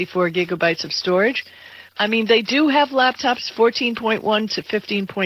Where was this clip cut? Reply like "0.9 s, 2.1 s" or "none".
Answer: 1.9 s